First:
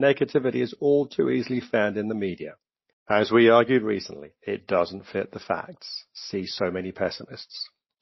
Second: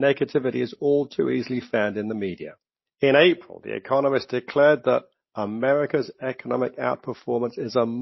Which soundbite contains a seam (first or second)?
second